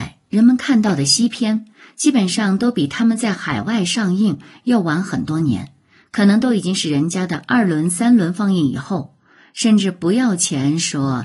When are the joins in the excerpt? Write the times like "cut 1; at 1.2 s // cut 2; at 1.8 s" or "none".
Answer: none